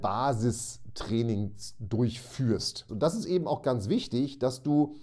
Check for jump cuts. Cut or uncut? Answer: cut